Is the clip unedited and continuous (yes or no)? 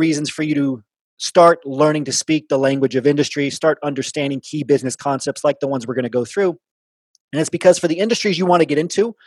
yes